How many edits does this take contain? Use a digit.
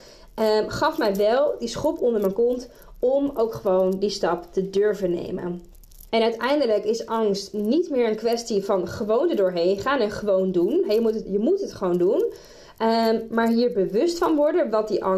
1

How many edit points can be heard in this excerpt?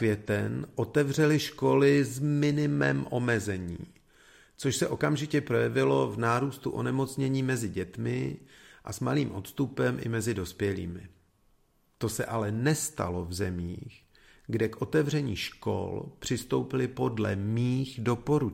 0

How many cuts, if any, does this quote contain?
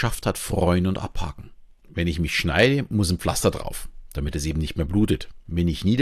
1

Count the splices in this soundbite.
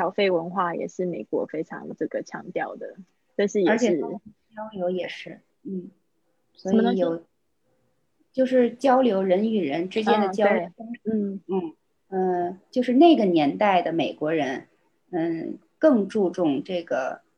1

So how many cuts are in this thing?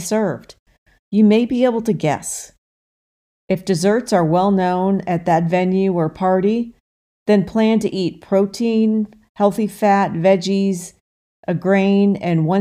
0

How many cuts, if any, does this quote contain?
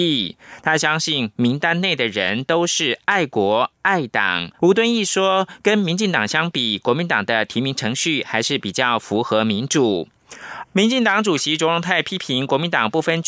2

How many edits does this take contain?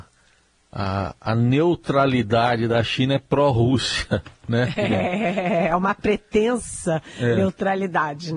0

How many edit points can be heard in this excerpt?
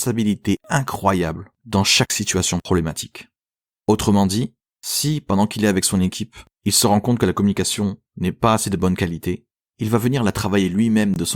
0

